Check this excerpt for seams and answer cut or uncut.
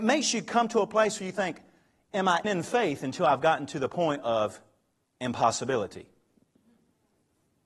cut